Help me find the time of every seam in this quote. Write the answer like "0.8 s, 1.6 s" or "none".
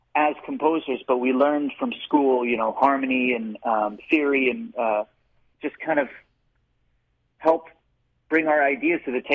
5.5 s